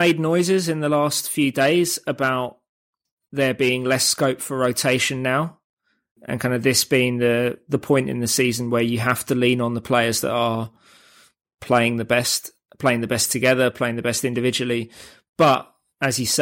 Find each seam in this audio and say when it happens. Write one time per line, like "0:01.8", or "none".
none